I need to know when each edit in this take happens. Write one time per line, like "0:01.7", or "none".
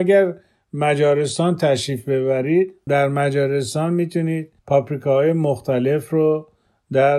0:02.9
0:04.6